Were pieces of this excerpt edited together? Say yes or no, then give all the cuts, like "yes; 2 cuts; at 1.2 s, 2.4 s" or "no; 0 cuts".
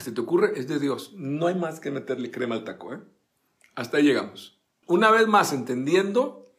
yes; 1 cut; at 4.8 s